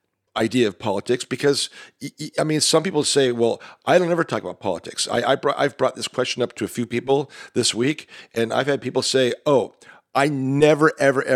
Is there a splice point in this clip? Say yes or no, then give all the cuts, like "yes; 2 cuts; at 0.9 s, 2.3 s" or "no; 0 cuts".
no; 0 cuts